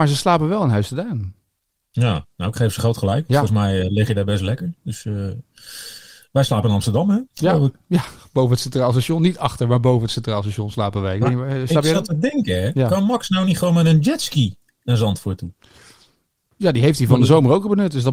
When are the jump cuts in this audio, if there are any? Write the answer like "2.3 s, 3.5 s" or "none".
none